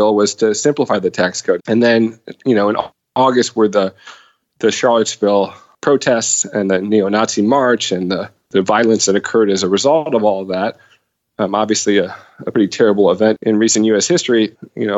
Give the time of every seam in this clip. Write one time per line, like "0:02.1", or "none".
0:01.6